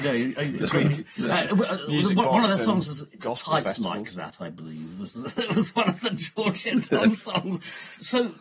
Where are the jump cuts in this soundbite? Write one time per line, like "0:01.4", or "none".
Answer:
none